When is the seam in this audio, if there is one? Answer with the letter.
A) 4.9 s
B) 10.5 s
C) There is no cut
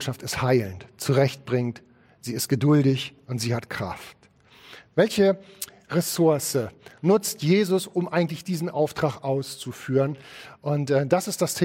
A